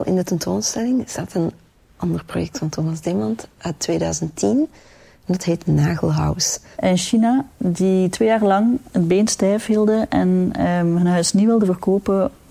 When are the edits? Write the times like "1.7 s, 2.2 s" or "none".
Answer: 6.7 s